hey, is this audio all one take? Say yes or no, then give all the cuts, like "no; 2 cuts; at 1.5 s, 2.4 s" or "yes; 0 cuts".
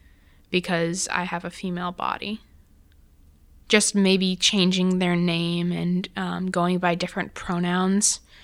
no; 1 cut; at 3.6 s